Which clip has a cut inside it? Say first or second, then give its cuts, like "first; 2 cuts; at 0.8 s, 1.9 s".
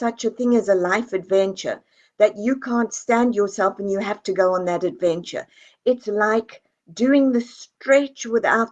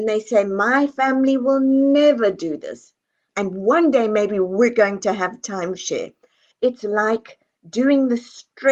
second; 2 cuts; at 3.3 s, 6.5 s